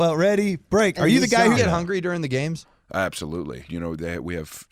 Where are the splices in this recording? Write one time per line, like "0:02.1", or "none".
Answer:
0:01.6
0:03.7